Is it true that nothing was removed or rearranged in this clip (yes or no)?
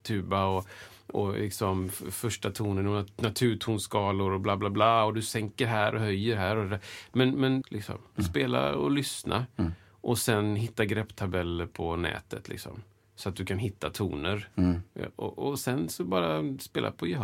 no